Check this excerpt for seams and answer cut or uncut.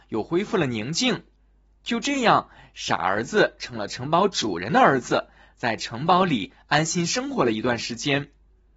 uncut